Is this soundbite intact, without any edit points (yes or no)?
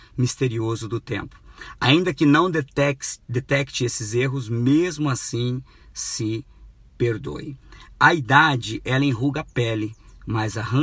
yes